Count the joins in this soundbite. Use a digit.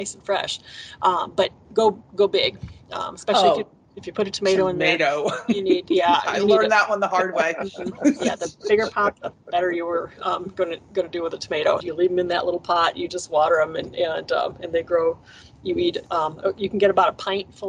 1